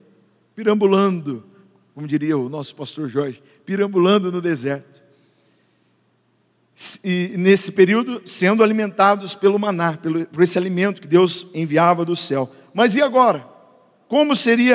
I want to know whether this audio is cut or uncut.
uncut